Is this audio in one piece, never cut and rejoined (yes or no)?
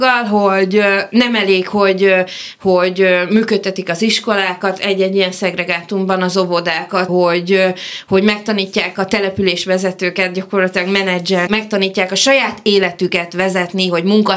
no